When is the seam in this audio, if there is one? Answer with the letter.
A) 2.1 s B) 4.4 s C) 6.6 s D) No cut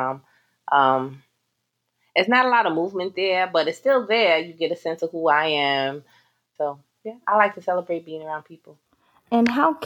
C